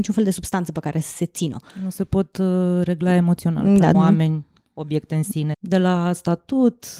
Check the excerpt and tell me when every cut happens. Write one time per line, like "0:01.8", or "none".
0:03.9
0:05.5